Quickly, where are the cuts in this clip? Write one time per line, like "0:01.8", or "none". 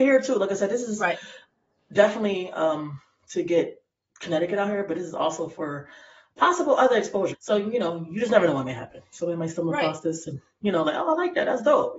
0:07.3